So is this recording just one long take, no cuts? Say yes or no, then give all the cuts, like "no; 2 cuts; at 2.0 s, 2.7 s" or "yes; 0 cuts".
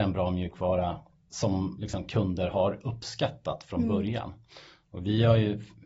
yes; 0 cuts